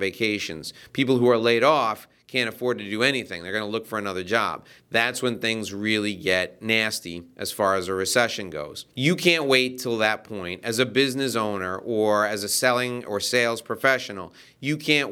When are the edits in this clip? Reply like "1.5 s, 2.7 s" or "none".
4.8 s, 8.9 s